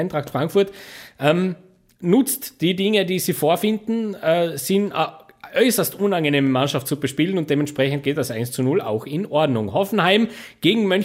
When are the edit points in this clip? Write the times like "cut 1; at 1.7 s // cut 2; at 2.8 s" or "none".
none

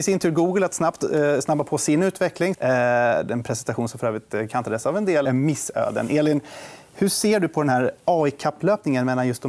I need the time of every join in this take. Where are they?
cut 1; at 2.5 s // cut 2; at 5.2 s

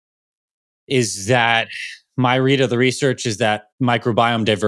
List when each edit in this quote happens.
cut 1; at 3.7 s

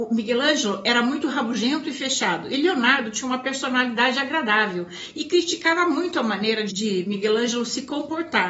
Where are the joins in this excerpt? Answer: cut 1; at 6.7 s

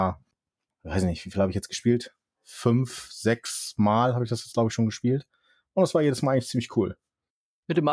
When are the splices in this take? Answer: none

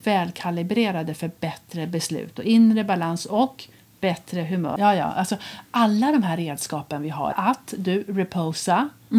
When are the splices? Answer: cut 1; at 4.8 s // cut 2; at 7.3 s

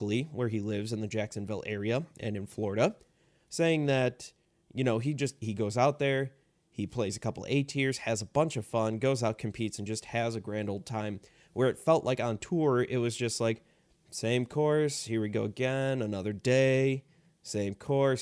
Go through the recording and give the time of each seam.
none

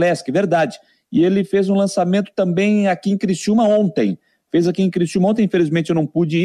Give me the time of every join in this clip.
none

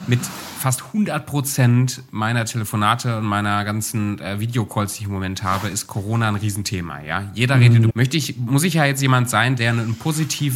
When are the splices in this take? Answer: cut 1; at 7.9 s // cut 2; at 9.6 s

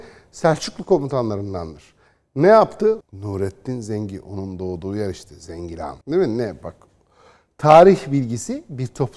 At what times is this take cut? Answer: cut 1; at 3.0 s // cut 2; at 6.0 s

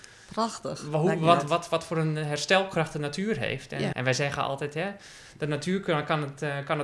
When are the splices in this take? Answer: cut 1; at 3.9 s

